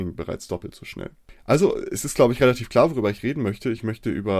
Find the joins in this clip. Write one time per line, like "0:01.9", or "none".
none

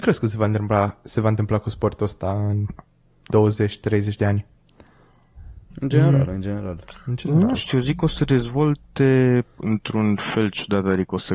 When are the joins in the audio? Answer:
0:05.7

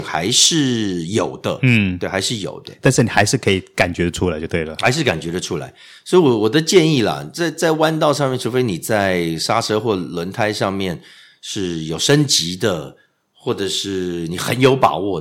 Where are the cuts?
none

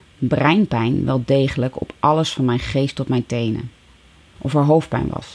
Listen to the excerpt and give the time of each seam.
0:04.4

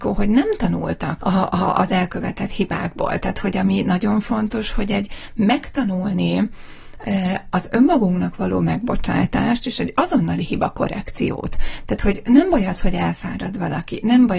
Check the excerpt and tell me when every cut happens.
0:01.2

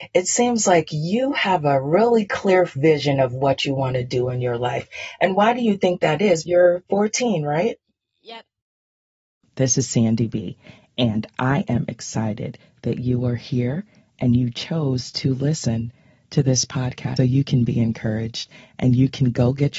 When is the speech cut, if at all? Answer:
0:06.5
0:17.2

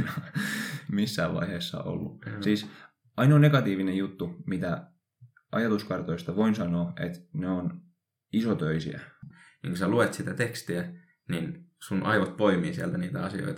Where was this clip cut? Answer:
0:09.3

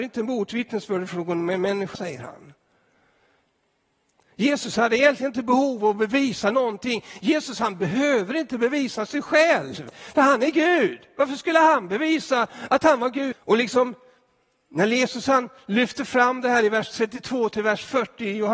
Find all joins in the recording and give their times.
0:01.9
0:13.3

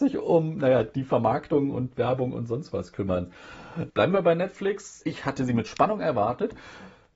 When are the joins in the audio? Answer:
0:03.9
0:05.0

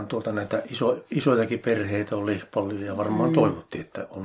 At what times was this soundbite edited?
none

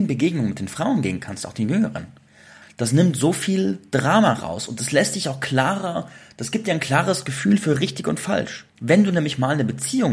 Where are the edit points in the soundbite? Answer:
0:02.6
0:08.7

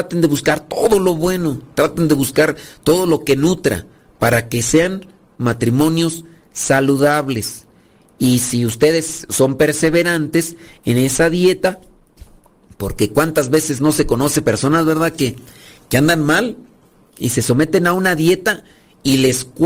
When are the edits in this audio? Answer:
none

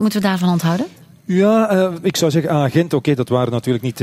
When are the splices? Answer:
0:02.0

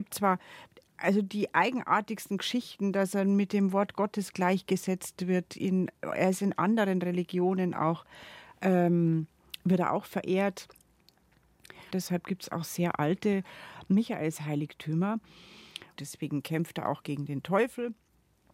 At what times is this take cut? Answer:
0:11.9
0:16.0

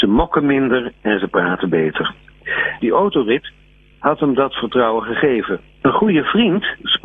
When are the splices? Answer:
0:02.8
0:05.8

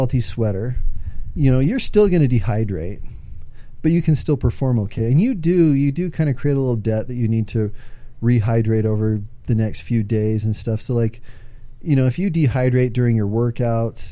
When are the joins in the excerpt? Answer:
none

